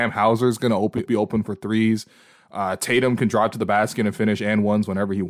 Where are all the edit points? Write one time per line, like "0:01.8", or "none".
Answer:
0:01.0